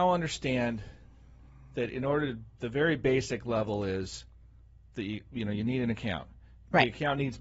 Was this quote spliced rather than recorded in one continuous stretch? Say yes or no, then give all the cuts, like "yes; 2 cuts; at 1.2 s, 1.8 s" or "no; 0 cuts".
no; 0 cuts